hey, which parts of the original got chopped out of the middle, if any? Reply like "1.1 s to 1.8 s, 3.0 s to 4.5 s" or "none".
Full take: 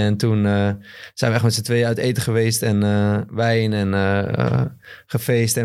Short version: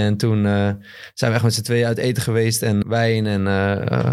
2.8 s to 3.3 s

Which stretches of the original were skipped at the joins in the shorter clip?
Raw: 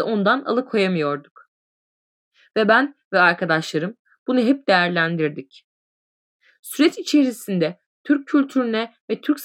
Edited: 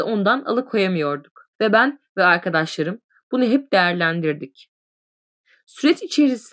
1.5 s to 2.5 s

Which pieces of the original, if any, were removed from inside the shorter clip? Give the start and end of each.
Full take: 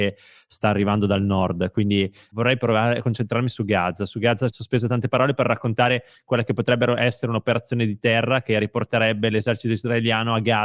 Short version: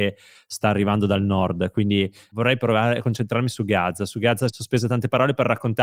none

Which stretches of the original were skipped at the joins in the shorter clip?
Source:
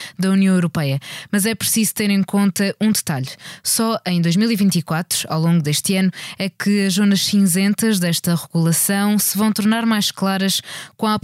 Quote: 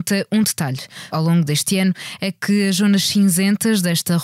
3.6 s to 5.3 s

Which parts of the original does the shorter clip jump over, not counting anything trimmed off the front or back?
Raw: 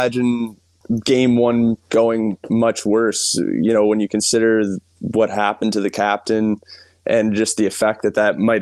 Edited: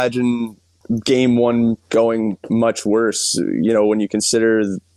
none

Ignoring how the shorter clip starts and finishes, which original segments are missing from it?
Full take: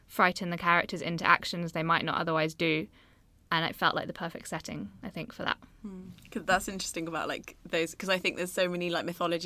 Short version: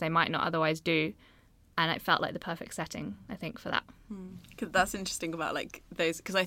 none

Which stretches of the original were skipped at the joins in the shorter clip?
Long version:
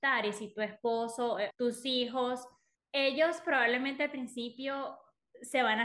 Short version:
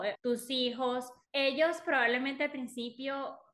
2.6 s to 2.8 s

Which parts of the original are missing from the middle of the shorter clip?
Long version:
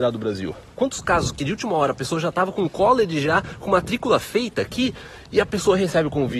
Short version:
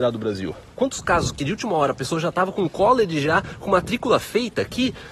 none

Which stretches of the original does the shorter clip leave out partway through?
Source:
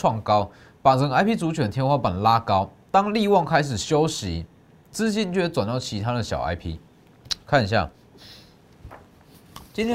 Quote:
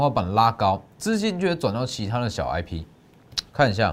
2.8 s to 4.8 s

